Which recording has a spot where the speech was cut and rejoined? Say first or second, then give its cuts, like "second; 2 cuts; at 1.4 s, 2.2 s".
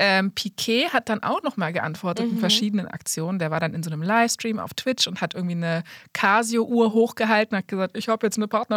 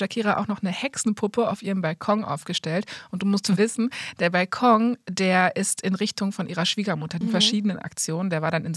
second; 1 cut; at 7.2 s